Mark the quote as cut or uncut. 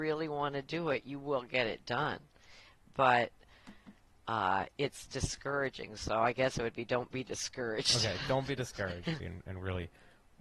cut